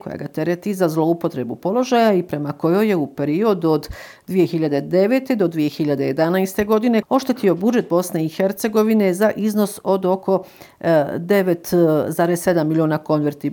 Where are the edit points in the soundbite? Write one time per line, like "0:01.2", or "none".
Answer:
0:07.0